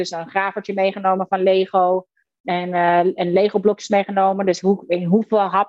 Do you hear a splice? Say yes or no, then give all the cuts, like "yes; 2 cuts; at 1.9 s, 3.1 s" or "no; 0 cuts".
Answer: no; 0 cuts